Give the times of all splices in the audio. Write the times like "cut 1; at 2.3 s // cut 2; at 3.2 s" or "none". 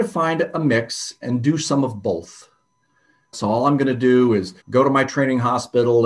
cut 1; at 3.3 s // cut 2; at 4.6 s